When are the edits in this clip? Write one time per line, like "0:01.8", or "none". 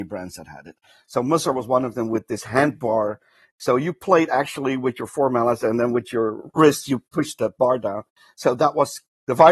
none